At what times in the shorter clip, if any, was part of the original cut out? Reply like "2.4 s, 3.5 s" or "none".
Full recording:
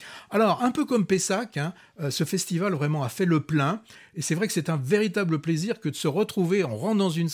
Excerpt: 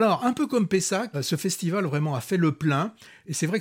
1.1 s